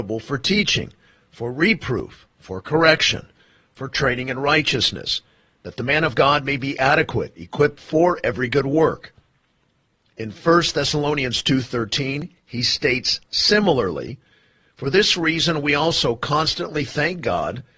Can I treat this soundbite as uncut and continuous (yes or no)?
yes